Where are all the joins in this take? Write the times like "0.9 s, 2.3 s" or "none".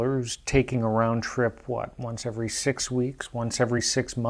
none